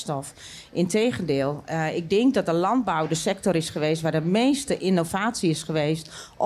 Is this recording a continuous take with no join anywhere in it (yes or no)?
yes